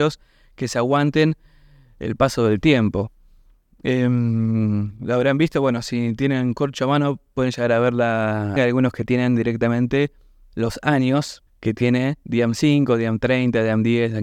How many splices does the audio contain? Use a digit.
2